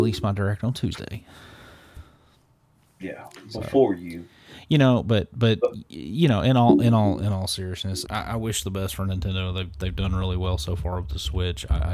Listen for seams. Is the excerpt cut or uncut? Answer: cut